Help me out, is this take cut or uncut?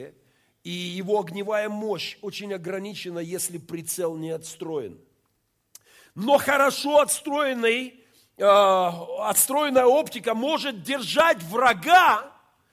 uncut